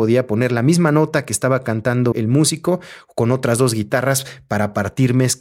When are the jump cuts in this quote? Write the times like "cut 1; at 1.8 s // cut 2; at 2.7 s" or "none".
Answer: cut 1; at 2.1 s